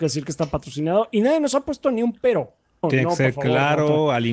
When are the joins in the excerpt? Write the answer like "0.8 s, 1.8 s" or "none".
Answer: 2.8 s